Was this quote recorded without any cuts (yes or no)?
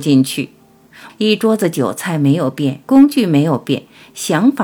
no